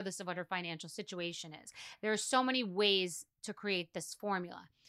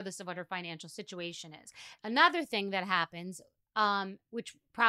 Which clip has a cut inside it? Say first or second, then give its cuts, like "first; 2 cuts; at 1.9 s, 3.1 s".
second; 1 cut; at 2.0 s